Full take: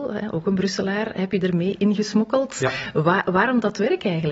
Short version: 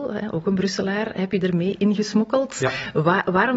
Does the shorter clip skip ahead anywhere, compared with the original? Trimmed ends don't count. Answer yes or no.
no